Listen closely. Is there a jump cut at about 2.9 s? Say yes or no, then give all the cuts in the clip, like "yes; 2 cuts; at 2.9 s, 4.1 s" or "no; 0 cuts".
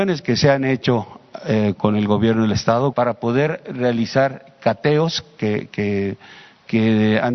yes; 2 cuts; at 1.7 s, 2.9 s